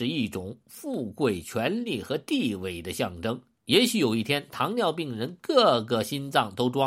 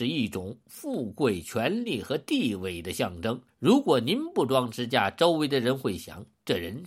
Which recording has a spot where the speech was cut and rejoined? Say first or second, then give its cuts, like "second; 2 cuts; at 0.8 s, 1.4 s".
second; 1 cut; at 3.5 s